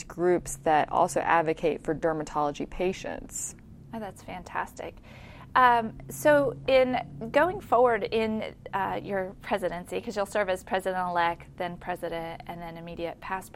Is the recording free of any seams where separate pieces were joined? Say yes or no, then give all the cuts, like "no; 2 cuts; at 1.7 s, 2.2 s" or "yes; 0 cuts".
yes; 0 cuts